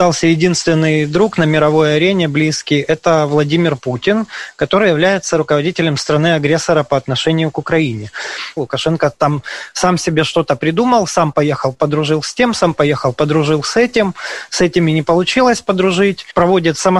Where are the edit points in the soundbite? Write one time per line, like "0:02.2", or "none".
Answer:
0:08.6